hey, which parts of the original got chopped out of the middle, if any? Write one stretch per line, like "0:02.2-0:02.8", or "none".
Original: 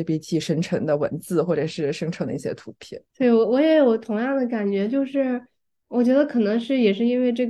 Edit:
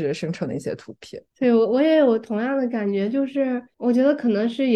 0:05.5-0:05.8